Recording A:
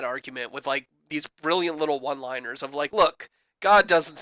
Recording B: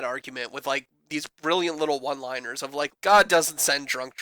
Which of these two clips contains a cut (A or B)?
B